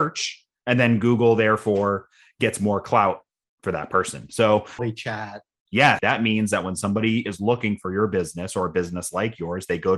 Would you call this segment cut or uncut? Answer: cut